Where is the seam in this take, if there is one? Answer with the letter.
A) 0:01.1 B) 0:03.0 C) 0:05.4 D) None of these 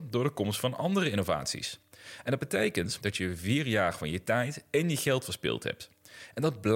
B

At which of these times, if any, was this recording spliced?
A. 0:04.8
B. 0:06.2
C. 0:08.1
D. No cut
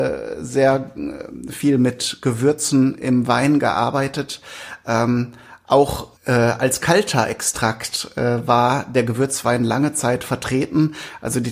B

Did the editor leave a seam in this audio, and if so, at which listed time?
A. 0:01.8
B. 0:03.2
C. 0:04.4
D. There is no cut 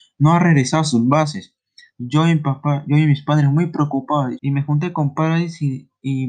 C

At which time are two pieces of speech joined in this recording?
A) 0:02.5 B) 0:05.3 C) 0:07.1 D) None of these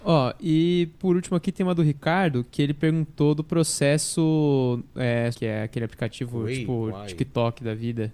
B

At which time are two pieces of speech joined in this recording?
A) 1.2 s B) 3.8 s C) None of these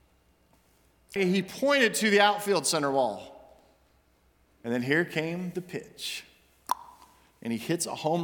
A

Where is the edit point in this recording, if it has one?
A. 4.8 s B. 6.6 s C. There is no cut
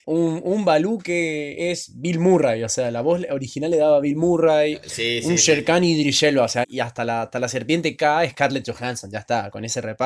B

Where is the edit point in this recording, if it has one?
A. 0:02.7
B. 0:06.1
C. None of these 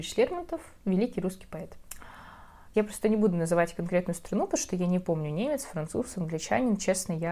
A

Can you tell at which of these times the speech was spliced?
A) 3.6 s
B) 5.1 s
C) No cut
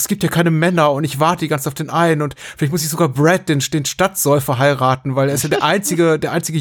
C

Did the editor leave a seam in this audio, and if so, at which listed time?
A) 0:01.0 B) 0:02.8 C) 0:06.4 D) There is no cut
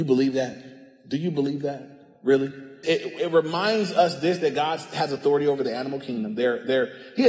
B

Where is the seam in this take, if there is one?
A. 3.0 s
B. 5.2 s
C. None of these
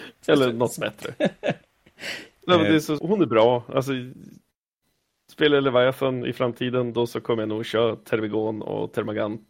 A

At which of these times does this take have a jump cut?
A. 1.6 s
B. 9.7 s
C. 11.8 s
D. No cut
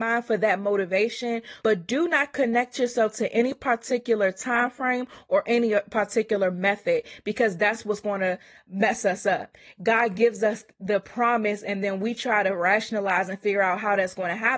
A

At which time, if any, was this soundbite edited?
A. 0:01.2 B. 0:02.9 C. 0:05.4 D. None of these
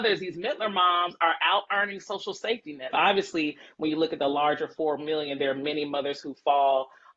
B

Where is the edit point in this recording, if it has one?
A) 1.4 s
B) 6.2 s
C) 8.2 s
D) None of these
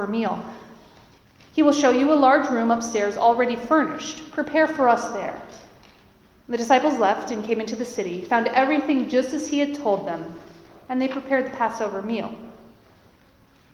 A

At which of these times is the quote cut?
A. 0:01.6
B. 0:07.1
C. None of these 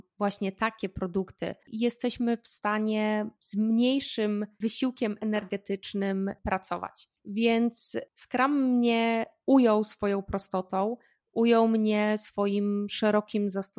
A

